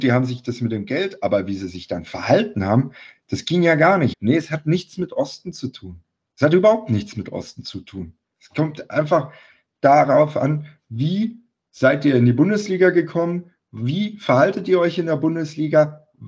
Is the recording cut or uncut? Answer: cut